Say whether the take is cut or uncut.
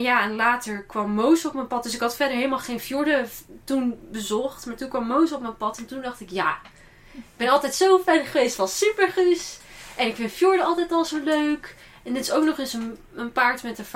uncut